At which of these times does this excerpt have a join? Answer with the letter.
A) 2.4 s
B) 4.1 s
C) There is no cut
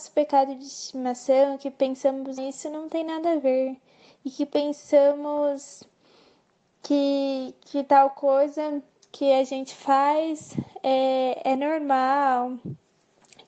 A